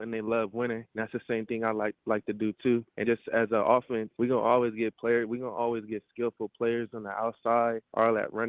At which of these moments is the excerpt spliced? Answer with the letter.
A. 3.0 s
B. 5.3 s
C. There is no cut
A